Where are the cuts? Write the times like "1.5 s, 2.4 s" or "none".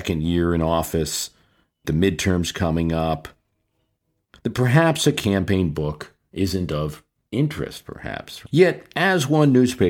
1.8 s